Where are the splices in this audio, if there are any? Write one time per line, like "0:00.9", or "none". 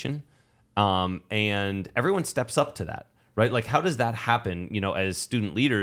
none